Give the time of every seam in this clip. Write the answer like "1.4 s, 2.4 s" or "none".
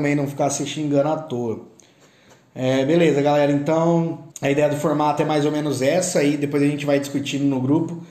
4.3 s